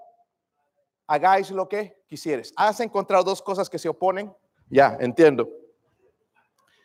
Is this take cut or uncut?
cut